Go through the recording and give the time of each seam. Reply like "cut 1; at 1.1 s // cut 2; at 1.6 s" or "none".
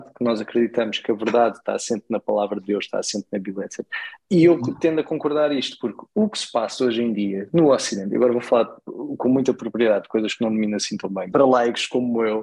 cut 1; at 4.2 s // cut 2; at 11.3 s